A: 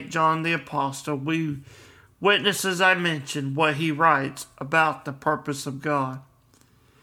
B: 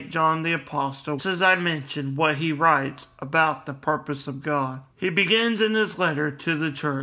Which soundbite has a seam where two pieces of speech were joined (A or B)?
B